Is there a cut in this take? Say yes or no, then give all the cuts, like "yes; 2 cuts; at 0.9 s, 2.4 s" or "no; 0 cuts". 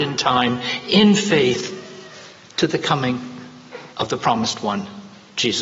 yes; 1 cut; at 3.9 s